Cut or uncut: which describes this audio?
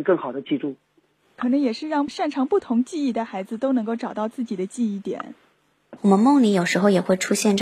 cut